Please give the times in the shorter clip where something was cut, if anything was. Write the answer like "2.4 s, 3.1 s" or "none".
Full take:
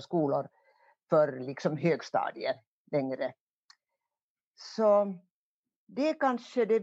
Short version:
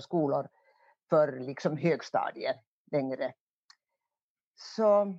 none